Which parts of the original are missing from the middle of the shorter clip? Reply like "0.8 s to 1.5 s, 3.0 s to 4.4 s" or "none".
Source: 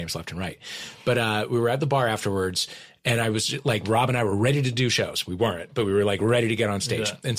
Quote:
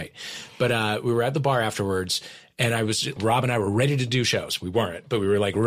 3.6 s to 3.8 s